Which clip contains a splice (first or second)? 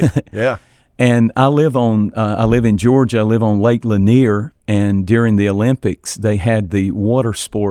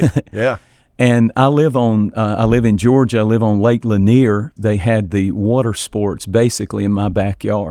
second